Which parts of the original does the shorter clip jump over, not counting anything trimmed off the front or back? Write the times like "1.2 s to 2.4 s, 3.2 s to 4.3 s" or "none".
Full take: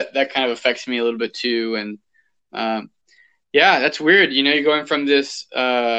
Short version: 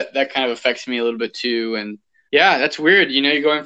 2.3 s to 3.5 s